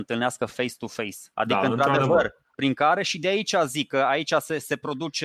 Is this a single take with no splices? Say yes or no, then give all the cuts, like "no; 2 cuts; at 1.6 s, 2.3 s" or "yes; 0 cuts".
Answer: no; 2 cuts; at 1.3 s, 2.5 s